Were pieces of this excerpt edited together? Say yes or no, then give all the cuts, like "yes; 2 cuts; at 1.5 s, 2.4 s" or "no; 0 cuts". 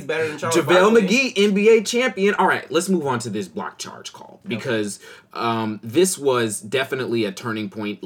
no; 0 cuts